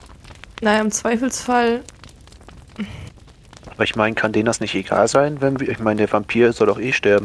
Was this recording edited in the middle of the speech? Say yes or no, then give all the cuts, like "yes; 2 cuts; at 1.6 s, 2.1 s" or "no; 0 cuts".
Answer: no; 0 cuts